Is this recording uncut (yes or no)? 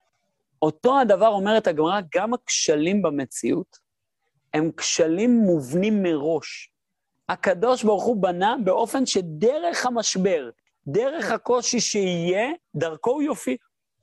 no